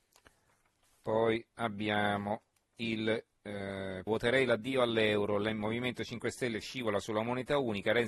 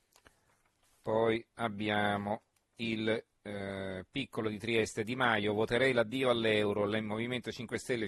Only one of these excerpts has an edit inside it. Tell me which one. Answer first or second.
first